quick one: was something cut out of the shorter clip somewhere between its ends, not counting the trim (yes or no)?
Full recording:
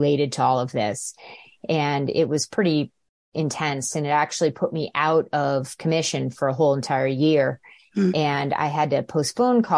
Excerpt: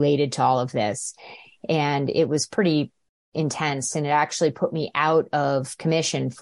no